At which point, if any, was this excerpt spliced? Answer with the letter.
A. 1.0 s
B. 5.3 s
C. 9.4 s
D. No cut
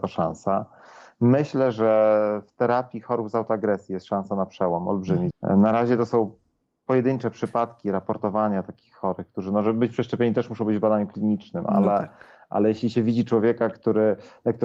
B